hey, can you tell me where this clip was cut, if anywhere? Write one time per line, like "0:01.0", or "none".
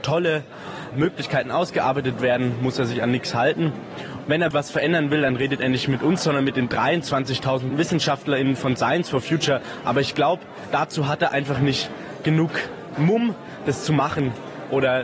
0:04.5